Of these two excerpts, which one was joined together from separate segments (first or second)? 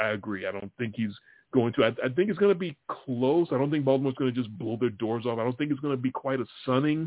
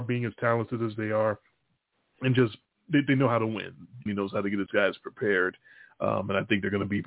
second